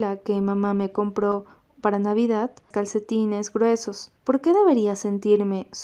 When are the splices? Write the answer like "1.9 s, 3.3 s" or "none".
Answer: 2.7 s, 4.2 s

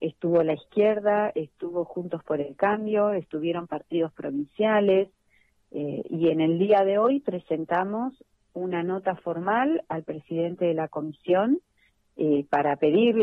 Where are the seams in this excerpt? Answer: none

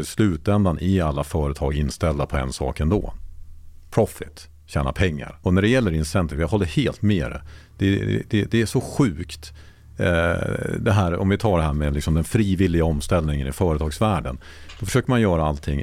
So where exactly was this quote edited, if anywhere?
5.4 s

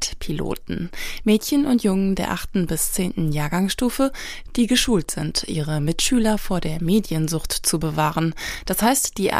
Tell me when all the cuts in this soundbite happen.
none

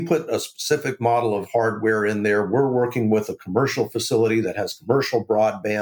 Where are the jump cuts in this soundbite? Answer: none

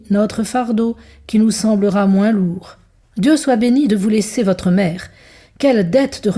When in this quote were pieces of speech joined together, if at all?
3.0 s

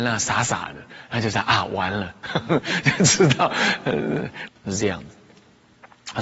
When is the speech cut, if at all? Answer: 4.5 s

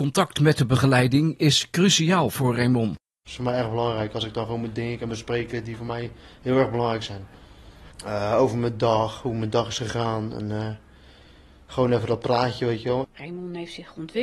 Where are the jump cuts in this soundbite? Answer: 13.0 s

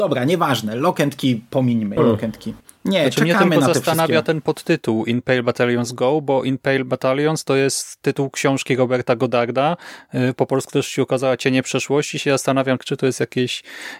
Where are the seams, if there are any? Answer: 2.0 s, 12.8 s

